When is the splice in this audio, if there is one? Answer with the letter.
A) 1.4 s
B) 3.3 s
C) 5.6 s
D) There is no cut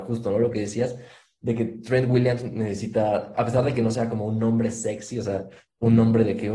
B